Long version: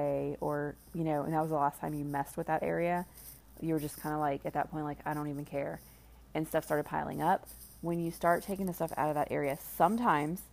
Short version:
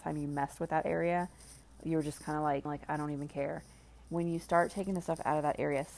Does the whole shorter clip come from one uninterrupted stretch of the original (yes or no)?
no